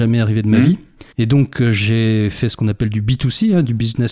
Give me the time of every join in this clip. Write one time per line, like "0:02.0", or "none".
0:01.1

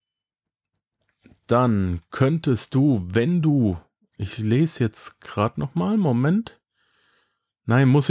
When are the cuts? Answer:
none

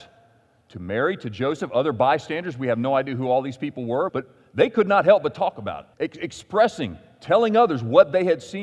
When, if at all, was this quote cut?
0:04.1
0:05.9

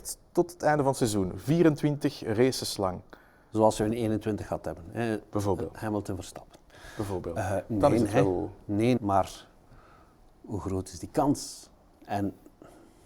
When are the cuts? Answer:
0:09.0

